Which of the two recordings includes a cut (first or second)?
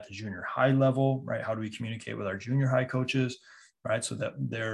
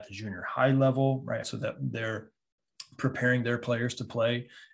second